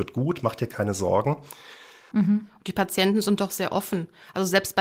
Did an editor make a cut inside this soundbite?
yes; 1 cut; at 2.1 s

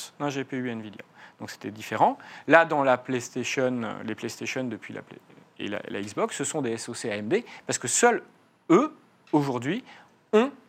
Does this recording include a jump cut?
no; 0 cuts

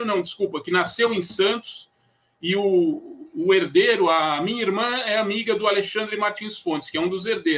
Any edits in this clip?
no; 0 cuts

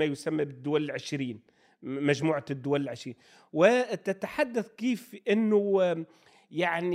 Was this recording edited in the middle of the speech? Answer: no; 0 cuts

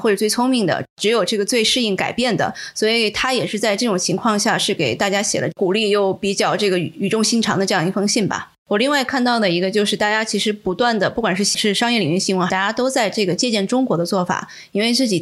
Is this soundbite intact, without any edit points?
no; 2 cuts; at 8.6 s, 12.5 s

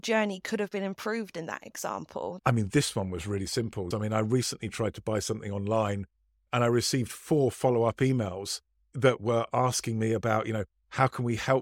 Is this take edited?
yes; 2 cuts; at 2.4 s, 3.9 s

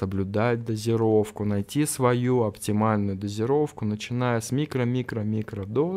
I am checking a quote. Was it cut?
no; 0 cuts

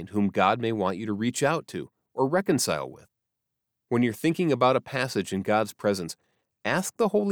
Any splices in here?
no; 0 cuts

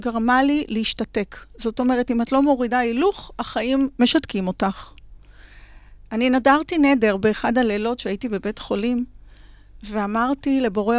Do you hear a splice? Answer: no; 0 cuts

